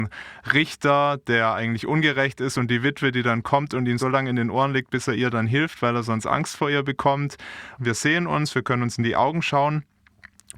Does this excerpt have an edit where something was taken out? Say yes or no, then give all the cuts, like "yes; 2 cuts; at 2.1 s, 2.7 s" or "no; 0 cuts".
yes; 2 cuts; at 4.0 s, 7.8 s